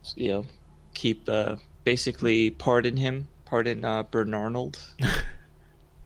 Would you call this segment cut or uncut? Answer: uncut